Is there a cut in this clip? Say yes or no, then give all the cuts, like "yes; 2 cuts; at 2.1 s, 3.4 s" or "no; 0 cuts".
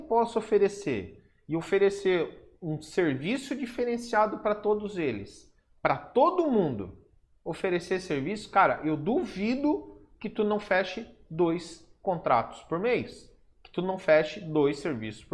no; 0 cuts